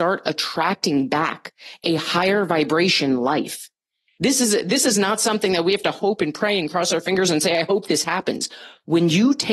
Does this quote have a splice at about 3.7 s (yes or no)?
no